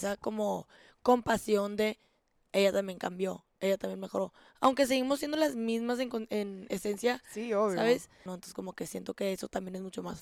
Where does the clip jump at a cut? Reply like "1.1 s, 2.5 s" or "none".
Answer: 8.3 s